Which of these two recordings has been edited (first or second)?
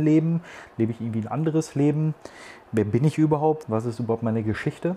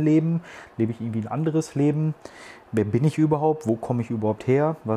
first